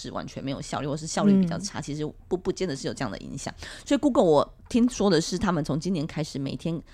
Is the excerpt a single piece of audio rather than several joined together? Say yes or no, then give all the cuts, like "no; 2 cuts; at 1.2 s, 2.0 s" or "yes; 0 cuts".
yes; 0 cuts